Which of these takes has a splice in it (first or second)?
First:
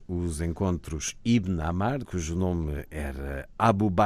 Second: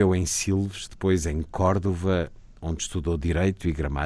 first